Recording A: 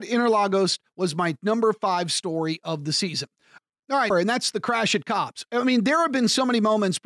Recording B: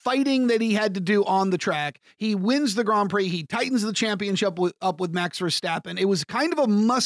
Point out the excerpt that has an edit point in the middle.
A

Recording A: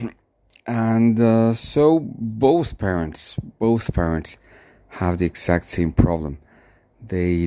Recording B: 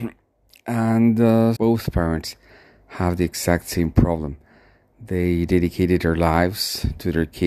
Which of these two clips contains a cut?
B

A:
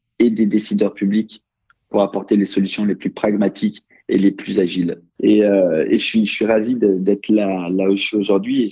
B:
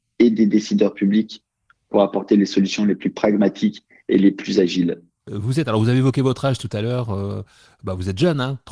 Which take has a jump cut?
A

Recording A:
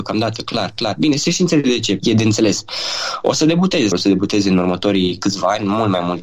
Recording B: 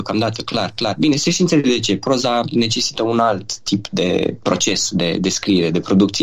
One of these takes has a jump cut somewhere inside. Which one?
A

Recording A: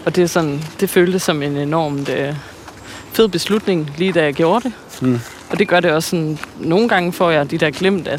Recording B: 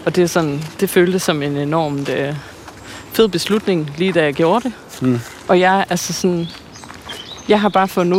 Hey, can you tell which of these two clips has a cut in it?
B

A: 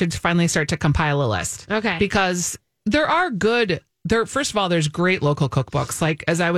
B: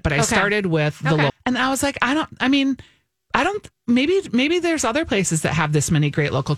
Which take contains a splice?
B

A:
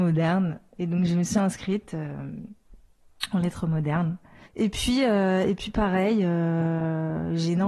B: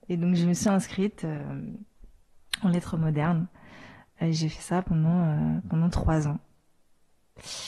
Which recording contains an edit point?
A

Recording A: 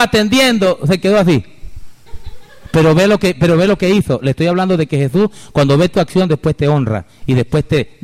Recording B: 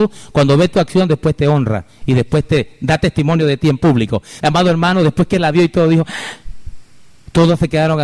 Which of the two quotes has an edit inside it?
B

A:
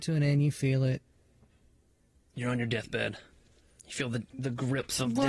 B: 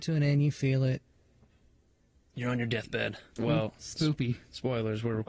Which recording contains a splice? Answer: B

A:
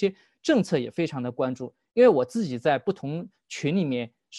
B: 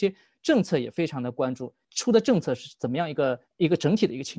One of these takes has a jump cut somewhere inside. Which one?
B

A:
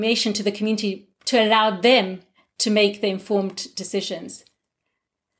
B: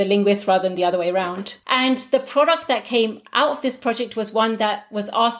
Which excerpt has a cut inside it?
B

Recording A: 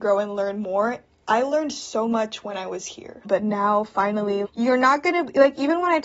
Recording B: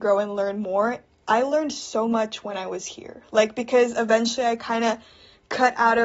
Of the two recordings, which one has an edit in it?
A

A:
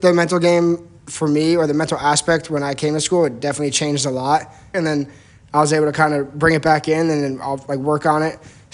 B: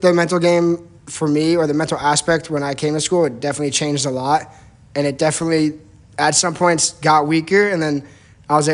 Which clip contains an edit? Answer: A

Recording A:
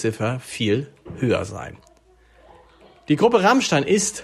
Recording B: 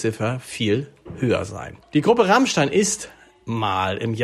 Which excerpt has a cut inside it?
B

